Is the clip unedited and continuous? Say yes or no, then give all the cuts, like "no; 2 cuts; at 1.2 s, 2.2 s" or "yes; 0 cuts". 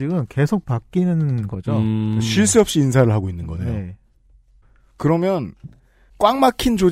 yes; 0 cuts